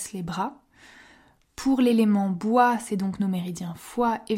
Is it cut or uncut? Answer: uncut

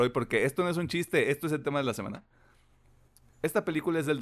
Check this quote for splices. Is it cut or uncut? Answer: uncut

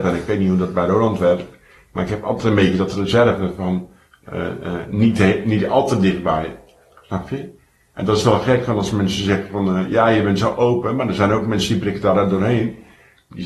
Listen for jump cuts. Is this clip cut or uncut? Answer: uncut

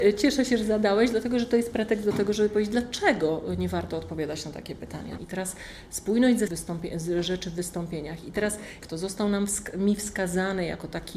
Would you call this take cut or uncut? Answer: cut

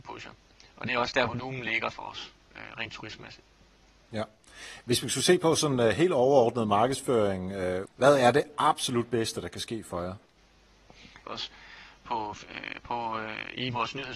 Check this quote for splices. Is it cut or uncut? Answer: cut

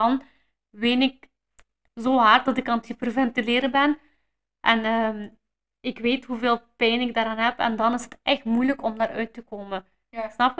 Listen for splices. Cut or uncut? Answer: uncut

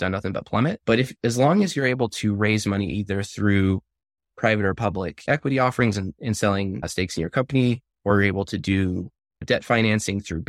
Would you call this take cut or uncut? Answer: uncut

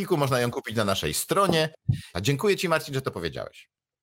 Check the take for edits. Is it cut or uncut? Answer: cut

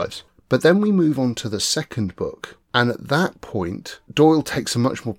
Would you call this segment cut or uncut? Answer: uncut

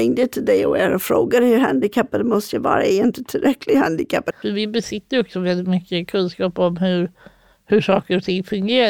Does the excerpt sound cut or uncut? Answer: cut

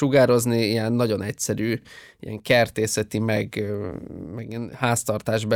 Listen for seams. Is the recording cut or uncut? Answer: uncut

